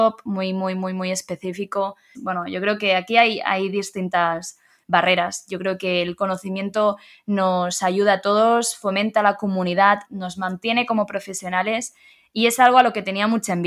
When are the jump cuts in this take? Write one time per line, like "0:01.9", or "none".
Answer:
0:02.1
0:10.1